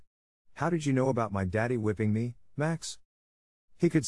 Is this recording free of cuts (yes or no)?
yes